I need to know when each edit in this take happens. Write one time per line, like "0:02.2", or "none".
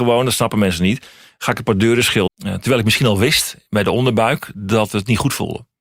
0:02.3